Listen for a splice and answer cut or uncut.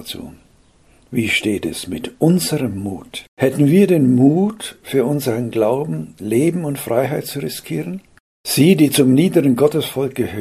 cut